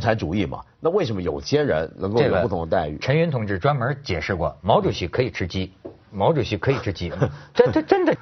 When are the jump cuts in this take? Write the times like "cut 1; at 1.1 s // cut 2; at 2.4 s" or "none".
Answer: none